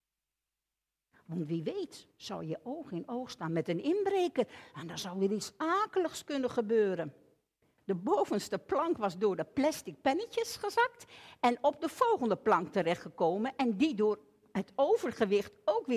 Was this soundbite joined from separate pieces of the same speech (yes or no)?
yes